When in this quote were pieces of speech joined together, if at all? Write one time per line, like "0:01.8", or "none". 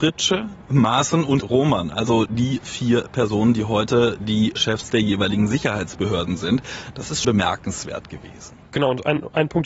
0:01.4
0:07.2